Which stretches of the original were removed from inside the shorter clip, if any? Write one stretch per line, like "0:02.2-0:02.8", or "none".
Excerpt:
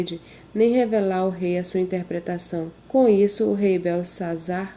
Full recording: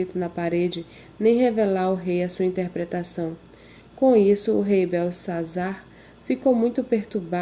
0:03.4-0:03.9